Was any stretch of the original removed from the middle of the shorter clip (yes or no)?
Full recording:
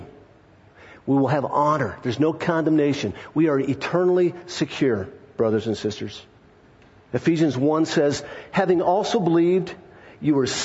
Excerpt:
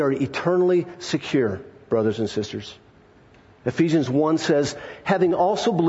no